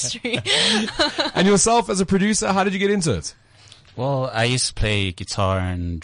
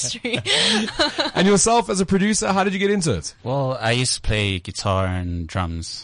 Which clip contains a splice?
second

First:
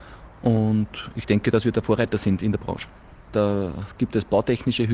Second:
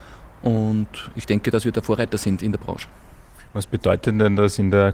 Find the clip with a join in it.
first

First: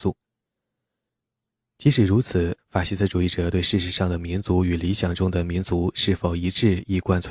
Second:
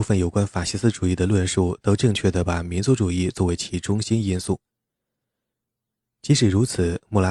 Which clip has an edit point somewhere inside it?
first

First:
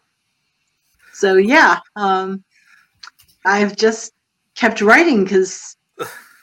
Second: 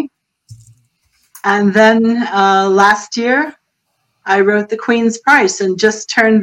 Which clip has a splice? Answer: first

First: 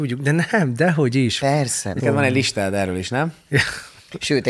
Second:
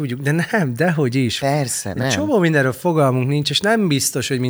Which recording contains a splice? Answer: first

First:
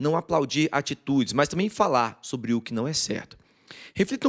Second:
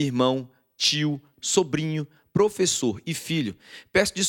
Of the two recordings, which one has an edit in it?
second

